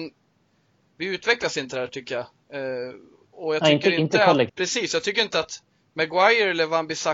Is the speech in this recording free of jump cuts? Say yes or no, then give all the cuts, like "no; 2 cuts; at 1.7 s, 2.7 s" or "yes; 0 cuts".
no; 1 cut; at 4.5 s